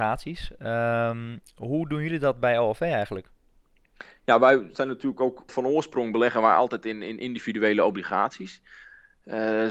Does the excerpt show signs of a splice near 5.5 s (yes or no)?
yes